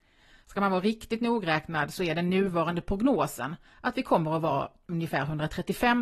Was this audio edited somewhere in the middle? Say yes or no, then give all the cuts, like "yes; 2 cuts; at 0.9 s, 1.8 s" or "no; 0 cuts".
yes; 1 cut; at 3.7 s